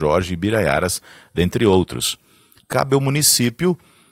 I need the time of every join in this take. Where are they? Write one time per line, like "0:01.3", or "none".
0:02.6